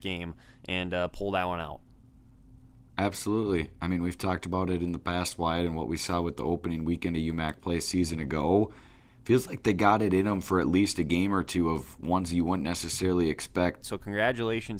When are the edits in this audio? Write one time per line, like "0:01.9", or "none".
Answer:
0:13.8